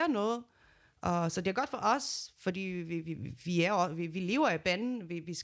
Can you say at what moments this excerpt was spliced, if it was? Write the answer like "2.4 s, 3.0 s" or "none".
none